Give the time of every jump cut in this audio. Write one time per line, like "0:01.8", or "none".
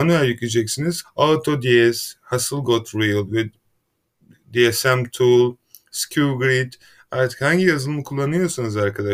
0:01.0